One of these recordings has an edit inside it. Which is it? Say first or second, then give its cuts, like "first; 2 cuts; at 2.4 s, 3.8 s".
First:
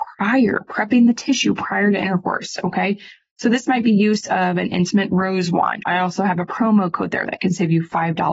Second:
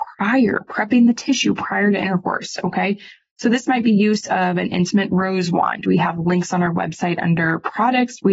first; 1 cut; at 5.8 s